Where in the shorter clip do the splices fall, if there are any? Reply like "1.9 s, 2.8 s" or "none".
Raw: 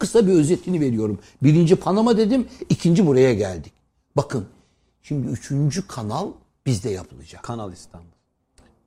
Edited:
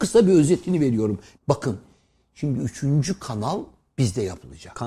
1.4 s

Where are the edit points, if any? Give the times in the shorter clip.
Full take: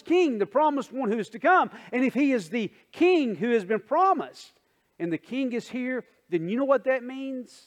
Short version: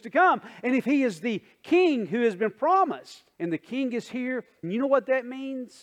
3.3 s, 4.6 s

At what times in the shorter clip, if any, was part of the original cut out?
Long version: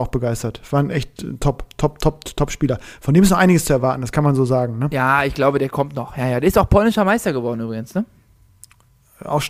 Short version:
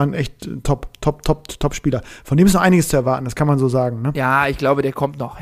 none

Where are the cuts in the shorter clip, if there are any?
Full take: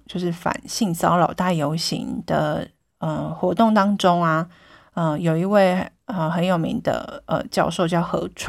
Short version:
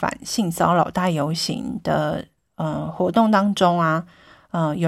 none

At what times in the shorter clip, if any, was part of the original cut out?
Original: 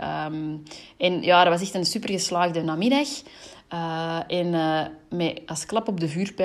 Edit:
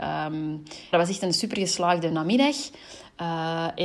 0.9 s

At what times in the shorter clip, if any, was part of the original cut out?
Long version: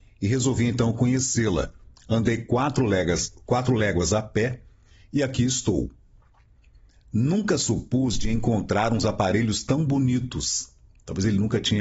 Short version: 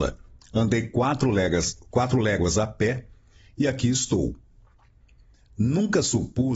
none

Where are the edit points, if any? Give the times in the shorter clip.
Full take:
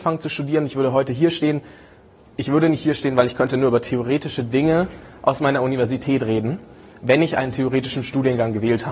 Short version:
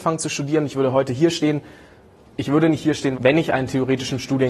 3.1 s

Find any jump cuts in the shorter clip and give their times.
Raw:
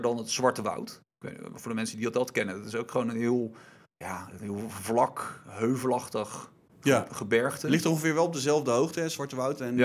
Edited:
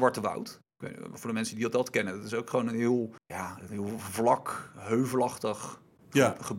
3.2 s

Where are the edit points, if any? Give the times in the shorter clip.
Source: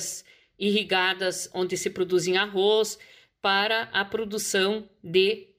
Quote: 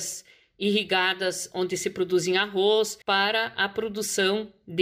3.0 s

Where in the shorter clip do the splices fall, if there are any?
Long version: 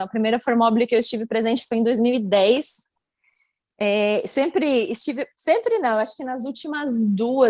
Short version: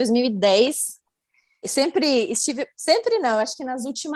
1.6 s

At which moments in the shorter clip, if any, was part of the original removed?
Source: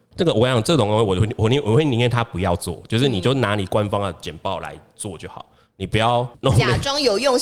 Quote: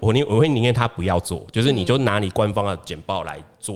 none

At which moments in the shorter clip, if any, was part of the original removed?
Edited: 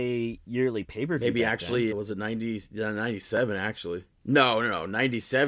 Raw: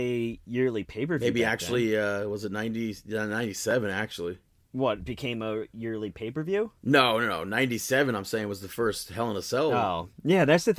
1.9 s, 4.2 s

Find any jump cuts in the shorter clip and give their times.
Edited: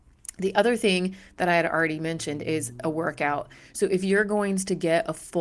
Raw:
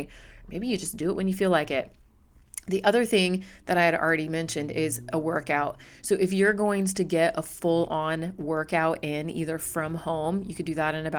none

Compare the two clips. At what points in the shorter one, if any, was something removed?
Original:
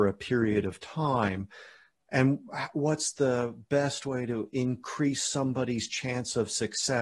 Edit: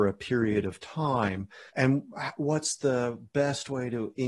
1.7 s

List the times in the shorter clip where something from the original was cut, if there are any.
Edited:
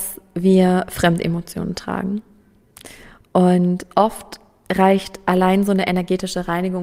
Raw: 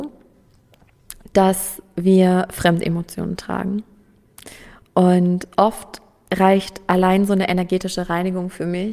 none

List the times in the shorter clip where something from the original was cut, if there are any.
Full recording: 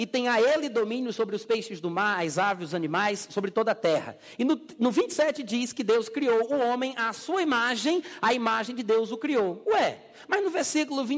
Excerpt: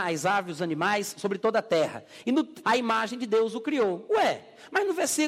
2.6 s

